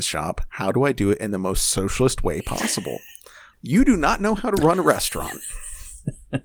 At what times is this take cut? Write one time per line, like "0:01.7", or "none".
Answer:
0:03.5